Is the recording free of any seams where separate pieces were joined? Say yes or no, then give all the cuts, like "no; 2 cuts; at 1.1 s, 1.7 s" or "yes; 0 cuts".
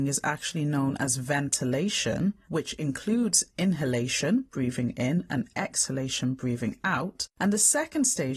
yes; 0 cuts